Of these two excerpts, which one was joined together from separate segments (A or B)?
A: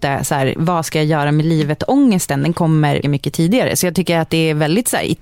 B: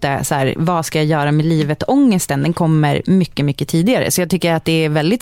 A